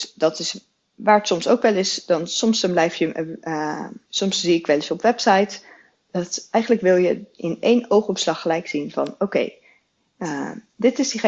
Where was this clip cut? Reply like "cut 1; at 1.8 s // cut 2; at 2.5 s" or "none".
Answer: cut 1; at 4.1 s